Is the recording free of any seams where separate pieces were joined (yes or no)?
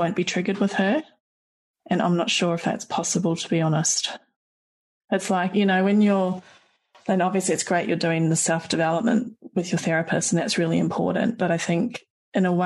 yes